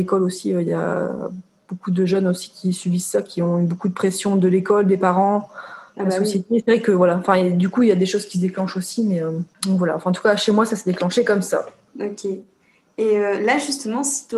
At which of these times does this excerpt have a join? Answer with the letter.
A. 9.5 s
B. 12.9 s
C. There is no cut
A